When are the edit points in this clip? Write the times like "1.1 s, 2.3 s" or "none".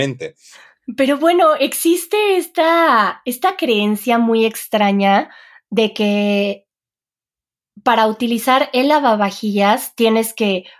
none